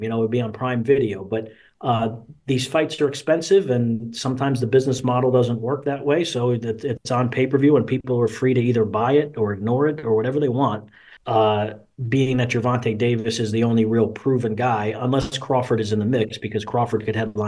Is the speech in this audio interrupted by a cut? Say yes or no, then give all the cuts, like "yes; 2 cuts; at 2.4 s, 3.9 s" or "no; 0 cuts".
yes; 1 cut; at 11.2 s